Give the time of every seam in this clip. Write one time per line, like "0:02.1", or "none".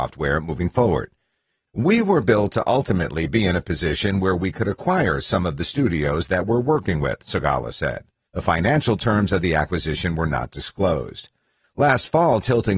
0:01.7
0:08.3